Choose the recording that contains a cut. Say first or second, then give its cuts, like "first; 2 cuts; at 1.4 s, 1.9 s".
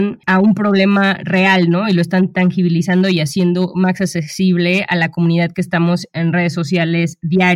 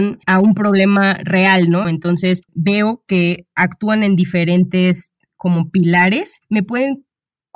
second; 1 cut; at 1.8 s